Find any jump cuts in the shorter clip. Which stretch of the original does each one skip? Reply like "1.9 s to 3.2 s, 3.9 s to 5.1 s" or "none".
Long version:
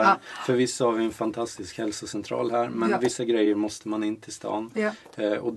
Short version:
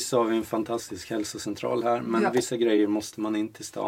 none